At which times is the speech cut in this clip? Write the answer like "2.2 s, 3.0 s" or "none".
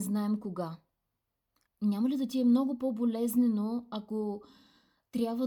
1.7 s